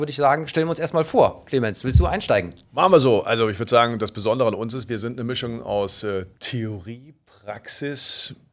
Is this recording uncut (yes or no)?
yes